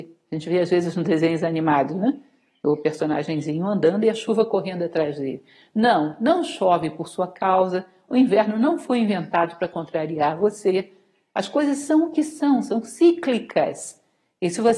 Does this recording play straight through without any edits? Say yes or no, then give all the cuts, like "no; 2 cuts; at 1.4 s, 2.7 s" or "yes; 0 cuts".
yes; 0 cuts